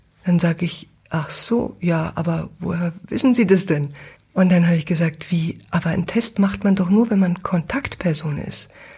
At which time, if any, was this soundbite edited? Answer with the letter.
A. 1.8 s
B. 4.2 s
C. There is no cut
B